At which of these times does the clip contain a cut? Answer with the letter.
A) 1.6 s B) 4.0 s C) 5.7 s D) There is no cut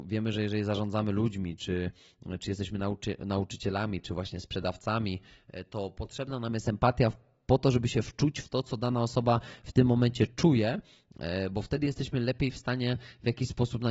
D